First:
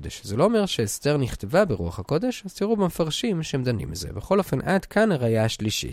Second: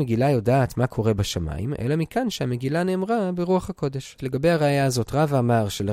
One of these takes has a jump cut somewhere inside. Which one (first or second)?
second